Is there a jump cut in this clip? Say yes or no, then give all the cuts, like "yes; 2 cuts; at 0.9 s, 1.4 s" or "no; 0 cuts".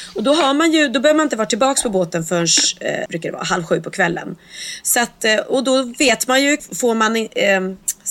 yes; 2 cuts; at 3.1 s, 6.6 s